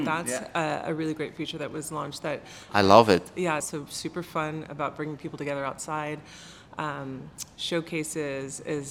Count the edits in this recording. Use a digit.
1